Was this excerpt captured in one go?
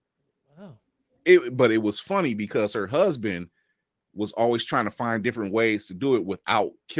yes; 0 cuts

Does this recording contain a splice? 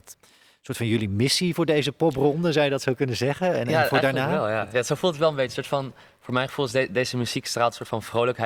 no; 0 cuts

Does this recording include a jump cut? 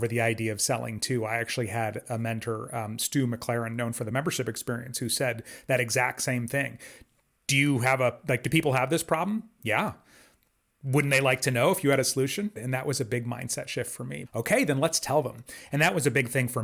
yes; 2 cuts; at 12.6 s, 14.3 s

